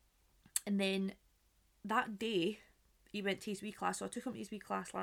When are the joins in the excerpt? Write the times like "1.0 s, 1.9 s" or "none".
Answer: none